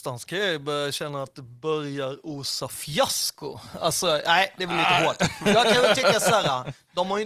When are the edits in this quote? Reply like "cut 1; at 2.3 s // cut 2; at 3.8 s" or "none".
none